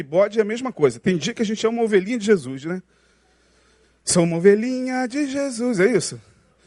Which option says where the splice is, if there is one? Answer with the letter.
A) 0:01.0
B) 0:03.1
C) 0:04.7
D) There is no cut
D